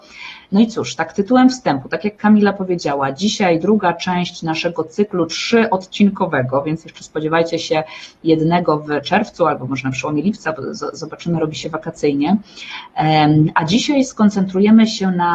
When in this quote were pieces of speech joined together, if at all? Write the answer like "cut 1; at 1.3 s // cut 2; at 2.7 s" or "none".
none